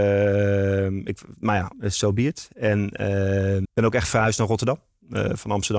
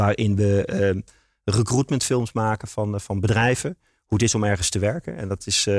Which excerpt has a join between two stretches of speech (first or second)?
first